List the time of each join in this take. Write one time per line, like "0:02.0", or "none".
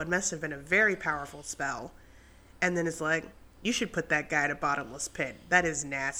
none